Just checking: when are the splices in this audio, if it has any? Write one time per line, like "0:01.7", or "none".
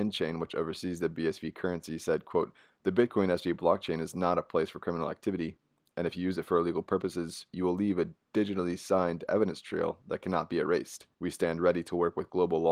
0:11.1

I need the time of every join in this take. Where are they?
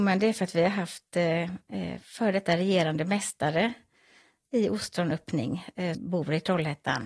0:05.9

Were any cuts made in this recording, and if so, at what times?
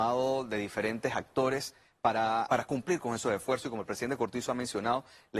0:02.5

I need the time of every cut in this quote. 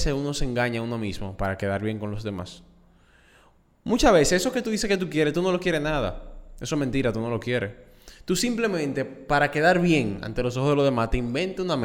none

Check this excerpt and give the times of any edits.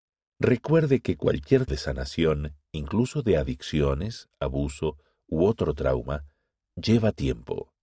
0:01.7

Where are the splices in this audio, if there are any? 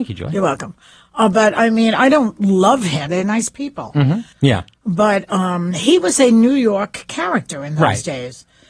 0:03.1
0:04.3

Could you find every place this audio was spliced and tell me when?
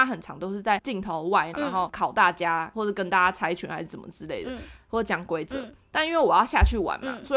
0:01.5

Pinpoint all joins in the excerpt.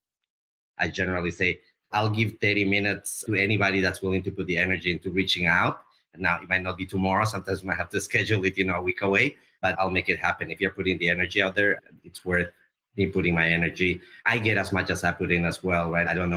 0:12.0

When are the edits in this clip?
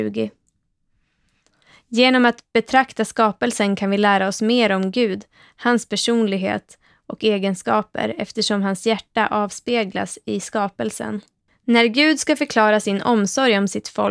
0:11.5

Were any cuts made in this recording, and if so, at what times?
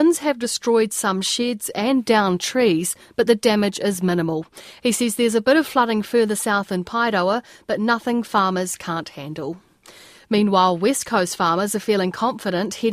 none

